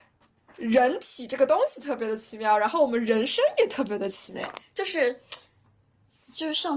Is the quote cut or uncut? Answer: uncut